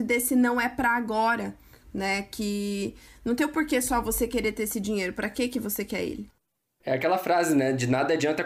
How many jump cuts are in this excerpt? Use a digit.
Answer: 0